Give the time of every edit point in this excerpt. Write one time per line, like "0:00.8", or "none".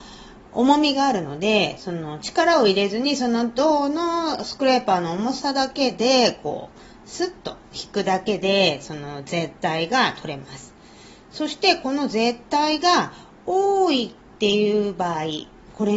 none